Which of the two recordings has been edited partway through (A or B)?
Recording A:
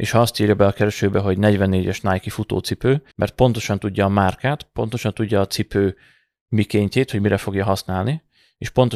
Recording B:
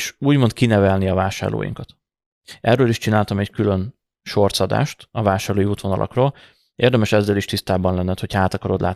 A